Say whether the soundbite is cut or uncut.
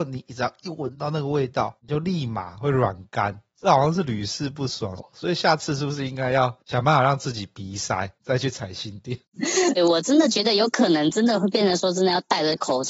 cut